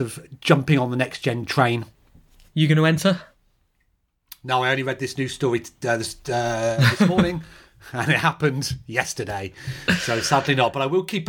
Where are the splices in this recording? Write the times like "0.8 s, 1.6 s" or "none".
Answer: none